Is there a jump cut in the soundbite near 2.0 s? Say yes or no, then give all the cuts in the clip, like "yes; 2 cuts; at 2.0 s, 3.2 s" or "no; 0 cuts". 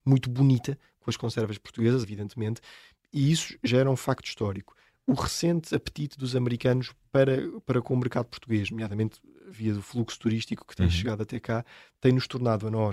yes; 1 cut; at 2.0 s